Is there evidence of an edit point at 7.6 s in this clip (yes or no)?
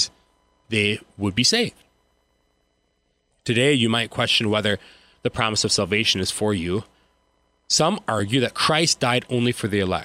no